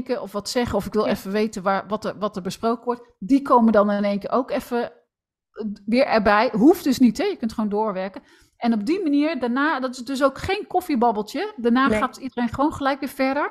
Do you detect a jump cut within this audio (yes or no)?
no